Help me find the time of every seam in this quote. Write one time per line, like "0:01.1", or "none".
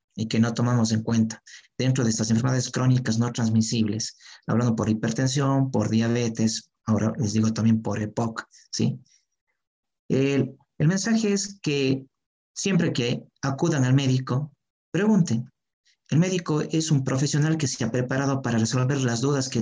none